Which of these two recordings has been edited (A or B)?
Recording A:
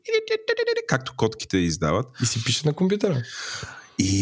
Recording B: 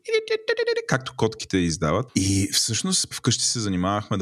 B